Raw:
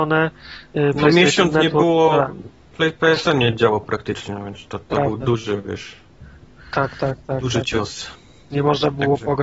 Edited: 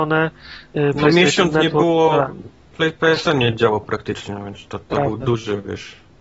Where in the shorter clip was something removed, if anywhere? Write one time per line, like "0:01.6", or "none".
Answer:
none